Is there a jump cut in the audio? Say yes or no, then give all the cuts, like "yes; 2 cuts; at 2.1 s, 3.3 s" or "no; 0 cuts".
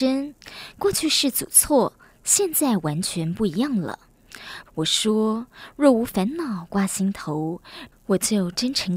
yes; 2 cuts; at 4.7 s, 7.9 s